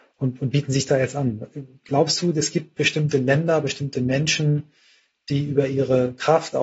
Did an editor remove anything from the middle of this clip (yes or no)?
no